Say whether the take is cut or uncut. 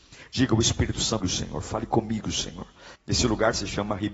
cut